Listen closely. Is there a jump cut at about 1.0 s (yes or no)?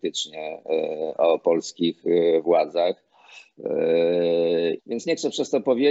no